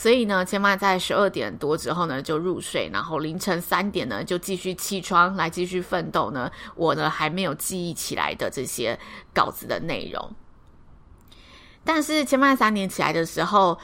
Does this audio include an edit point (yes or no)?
no